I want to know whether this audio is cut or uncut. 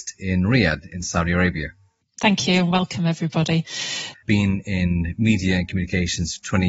cut